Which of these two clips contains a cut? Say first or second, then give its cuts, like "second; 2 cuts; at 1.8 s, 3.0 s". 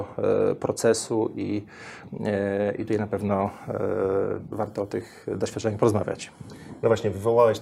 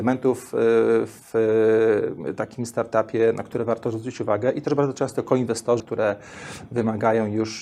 second; 1 cut; at 5.8 s